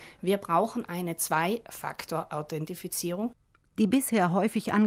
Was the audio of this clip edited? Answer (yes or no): no